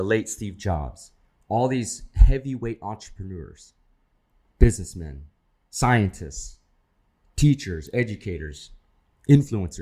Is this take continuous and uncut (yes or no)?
yes